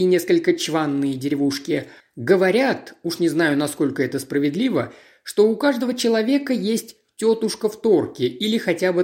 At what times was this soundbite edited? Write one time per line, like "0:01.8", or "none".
0:02.0